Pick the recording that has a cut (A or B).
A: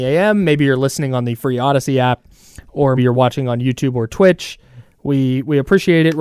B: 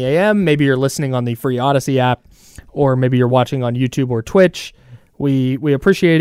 A